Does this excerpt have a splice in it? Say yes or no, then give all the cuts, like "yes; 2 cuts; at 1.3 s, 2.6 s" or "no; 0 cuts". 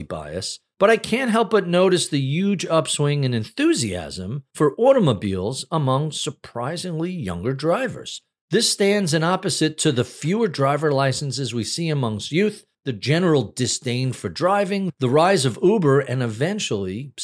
no; 0 cuts